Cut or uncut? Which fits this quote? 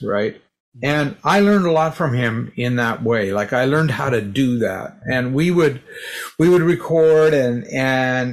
uncut